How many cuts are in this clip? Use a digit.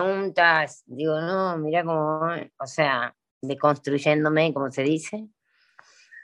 0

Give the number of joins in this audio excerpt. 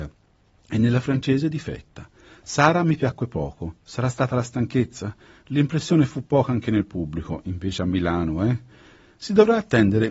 0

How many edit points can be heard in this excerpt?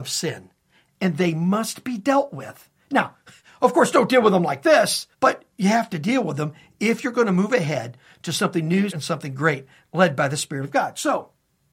2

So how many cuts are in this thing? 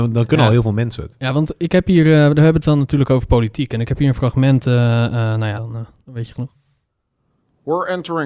1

